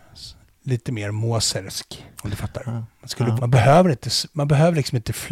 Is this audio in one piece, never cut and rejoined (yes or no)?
no